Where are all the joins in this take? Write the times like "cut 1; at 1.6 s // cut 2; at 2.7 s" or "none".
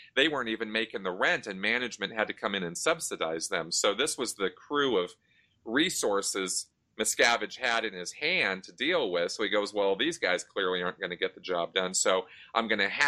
none